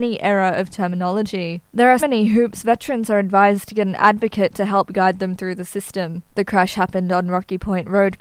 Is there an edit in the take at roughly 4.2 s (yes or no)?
no